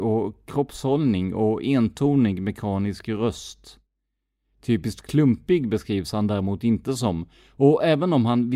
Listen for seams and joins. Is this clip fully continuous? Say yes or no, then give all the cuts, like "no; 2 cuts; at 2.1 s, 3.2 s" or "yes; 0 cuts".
yes; 0 cuts